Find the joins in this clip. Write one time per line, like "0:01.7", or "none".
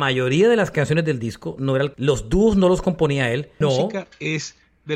0:01.9
0:03.6